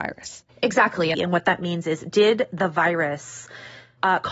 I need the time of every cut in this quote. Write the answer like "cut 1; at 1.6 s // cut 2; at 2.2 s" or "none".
cut 1; at 1.1 s